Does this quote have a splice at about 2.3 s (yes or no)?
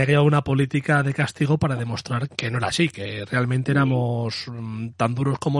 yes